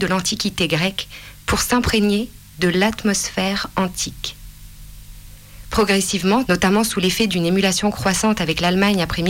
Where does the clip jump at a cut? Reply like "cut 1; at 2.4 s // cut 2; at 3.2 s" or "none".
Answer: cut 1; at 6.4 s